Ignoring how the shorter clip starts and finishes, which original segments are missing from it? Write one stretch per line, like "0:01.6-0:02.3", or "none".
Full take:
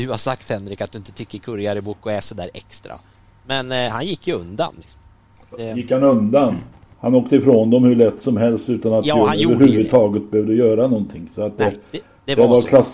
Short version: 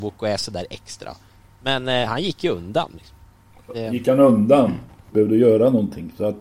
0:07.0-0:10.3

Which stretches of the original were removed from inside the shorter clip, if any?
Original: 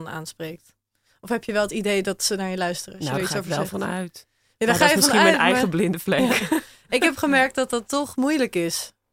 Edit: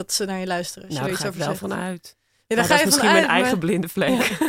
none

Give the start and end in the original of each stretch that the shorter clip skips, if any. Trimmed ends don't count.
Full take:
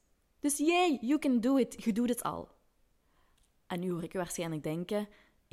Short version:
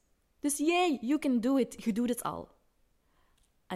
none

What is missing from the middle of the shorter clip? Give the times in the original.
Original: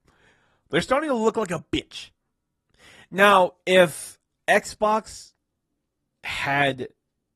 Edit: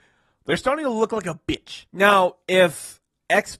0:02.1-0:03.1

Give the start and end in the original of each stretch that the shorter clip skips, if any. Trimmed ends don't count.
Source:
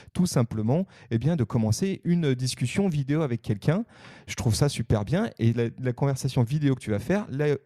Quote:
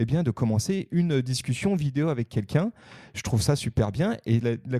none

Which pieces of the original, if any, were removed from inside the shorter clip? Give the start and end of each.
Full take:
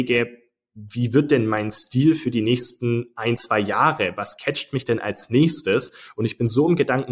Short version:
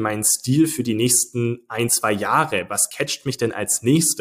none

